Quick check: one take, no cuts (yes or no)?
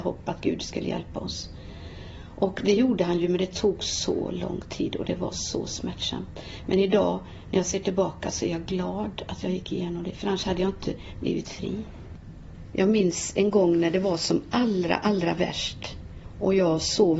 yes